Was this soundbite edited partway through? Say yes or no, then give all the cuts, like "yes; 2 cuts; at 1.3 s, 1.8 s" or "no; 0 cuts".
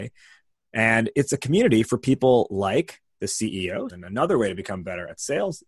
yes; 1 cut; at 3.9 s